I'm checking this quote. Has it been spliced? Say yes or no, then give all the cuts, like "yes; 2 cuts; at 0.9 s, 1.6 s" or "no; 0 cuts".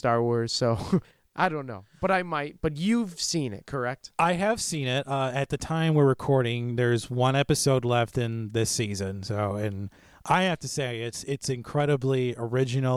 no; 0 cuts